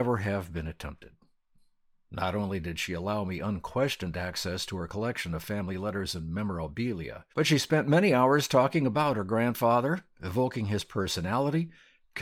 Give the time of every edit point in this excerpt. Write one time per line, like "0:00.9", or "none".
0:07.3